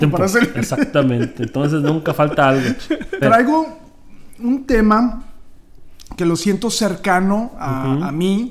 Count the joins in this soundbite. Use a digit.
1